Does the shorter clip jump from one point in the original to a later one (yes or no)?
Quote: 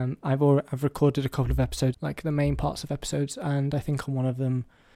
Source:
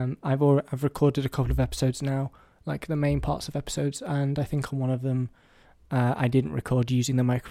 yes